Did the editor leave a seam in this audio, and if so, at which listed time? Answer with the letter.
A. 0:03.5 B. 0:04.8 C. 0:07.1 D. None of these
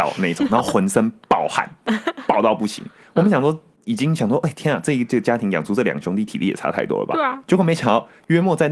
D